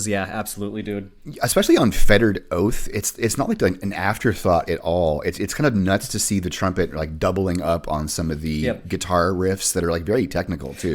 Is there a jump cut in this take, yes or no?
no